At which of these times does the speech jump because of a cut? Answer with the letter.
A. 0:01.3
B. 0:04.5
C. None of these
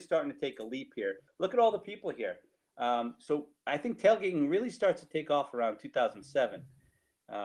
A